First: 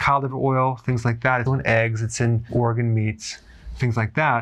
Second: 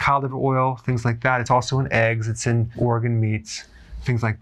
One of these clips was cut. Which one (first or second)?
first